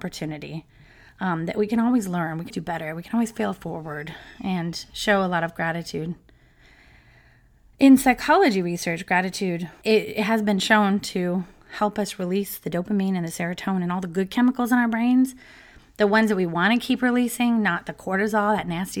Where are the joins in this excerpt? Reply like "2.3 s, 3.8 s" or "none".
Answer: 2.5 s, 9.8 s